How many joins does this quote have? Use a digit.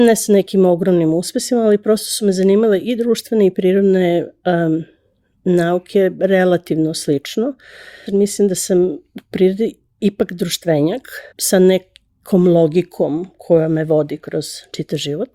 2